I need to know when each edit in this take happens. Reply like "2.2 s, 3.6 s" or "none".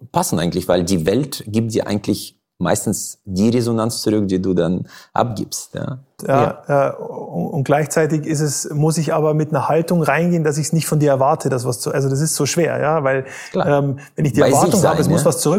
6.2 s